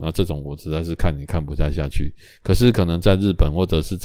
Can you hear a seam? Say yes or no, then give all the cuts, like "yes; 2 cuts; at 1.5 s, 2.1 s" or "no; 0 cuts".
no; 0 cuts